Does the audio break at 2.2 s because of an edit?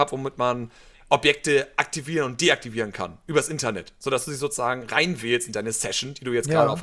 no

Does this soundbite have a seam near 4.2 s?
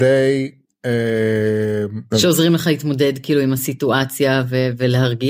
no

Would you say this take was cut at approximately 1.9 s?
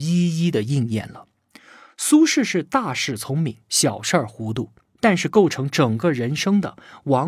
no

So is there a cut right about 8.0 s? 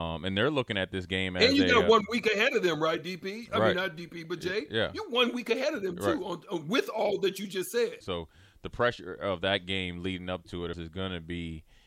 yes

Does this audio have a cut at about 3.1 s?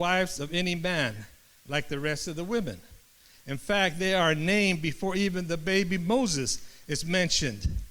no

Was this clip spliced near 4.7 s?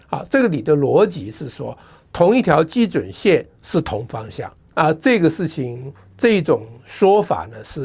yes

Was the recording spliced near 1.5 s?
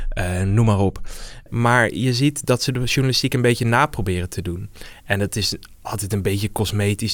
yes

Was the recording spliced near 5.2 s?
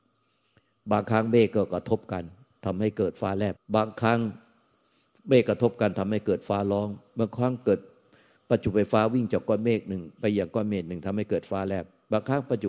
no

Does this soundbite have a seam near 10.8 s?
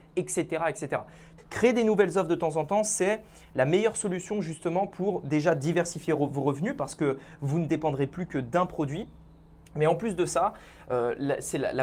no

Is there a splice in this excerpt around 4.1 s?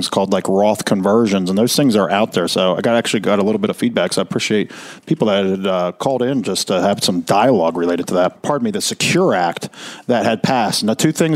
no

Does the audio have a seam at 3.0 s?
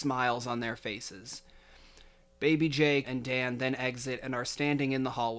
yes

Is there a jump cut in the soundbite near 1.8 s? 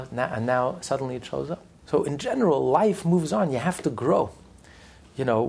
yes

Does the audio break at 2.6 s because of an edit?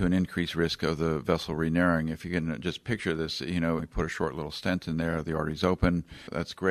no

